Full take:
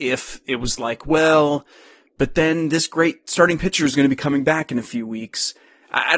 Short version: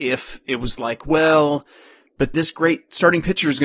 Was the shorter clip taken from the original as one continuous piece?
no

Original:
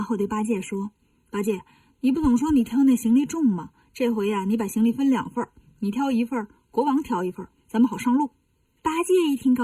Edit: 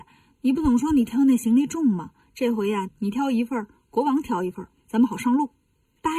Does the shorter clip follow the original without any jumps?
no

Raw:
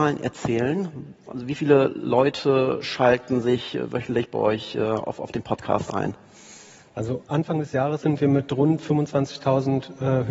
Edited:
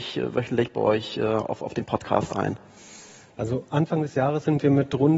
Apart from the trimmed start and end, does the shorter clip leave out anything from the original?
no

